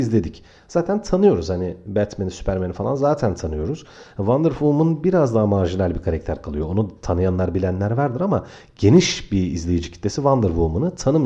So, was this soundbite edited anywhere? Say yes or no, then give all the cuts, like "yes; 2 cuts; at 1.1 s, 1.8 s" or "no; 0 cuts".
no; 0 cuts